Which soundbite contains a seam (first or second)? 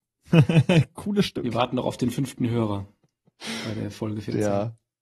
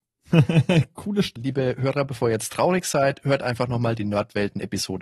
second